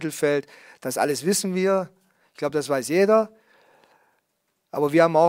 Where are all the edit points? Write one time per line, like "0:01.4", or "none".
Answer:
none